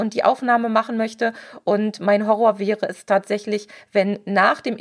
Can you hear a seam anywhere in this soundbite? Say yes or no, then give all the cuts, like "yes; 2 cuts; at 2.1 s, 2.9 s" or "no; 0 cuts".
no; 0 cuts